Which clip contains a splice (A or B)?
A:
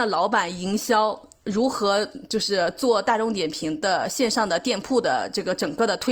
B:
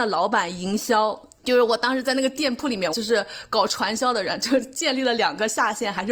B